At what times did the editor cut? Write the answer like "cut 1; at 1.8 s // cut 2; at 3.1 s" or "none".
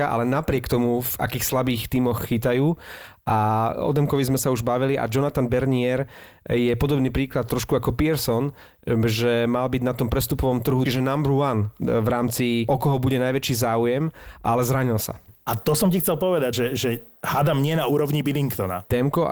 cut 1; at 10.9 s // cut 2; at 15.3 s // cut 3; at 16.5 s